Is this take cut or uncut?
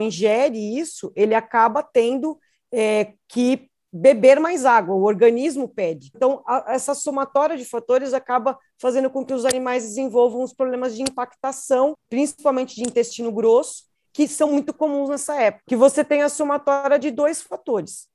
cut